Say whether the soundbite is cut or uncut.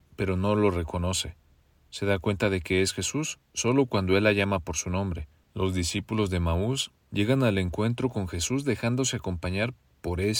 cut